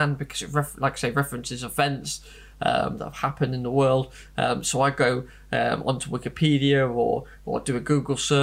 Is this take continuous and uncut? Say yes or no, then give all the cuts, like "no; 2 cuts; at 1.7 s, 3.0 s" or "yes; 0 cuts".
yes; 0 cuts